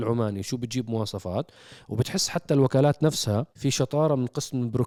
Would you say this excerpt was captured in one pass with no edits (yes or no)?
no